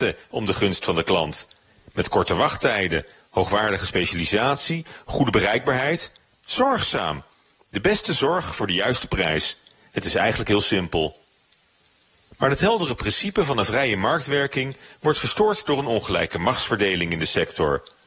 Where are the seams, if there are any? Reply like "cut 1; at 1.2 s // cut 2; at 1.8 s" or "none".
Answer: none